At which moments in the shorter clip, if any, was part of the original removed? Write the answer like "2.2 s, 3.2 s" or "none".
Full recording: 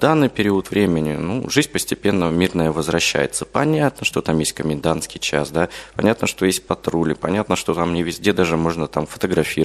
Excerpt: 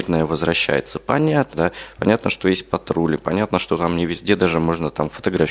1.5 s